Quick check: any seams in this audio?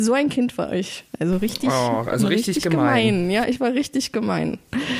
yes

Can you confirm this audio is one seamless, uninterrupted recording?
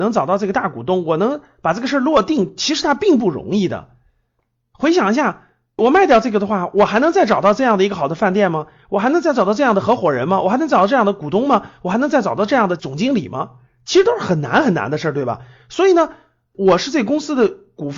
yes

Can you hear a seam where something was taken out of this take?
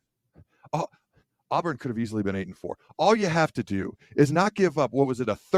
no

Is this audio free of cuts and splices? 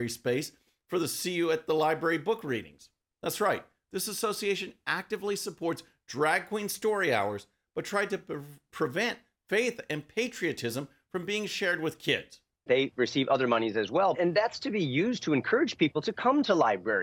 no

